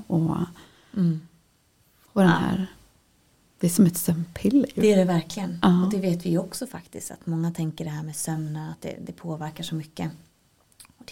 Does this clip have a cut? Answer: no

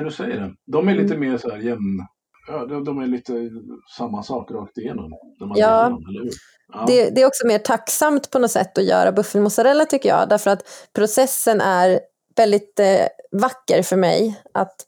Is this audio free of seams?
yes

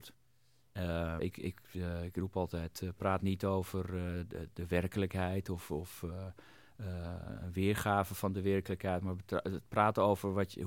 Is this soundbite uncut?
no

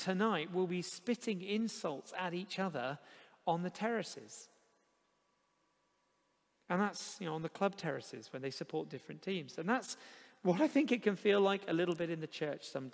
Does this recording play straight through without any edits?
yes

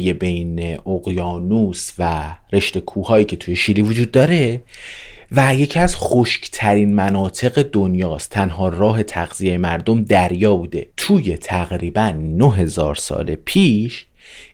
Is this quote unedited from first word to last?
no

